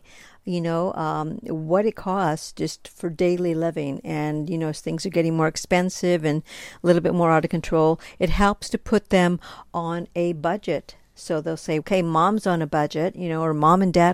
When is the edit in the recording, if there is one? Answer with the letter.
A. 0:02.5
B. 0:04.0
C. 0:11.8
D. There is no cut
C